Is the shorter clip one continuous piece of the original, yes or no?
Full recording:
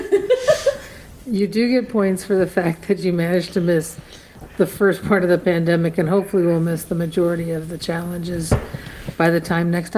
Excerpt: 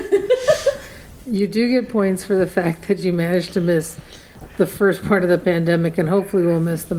yes